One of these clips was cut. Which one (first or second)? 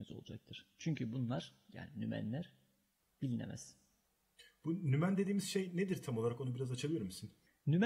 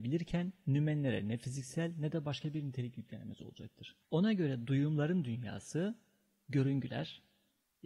second